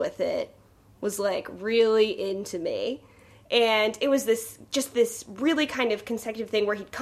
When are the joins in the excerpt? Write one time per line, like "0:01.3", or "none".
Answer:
none